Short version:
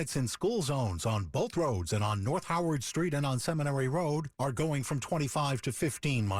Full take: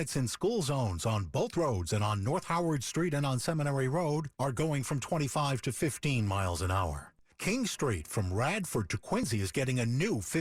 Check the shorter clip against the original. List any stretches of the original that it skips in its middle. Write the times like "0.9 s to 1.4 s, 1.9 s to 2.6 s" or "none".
none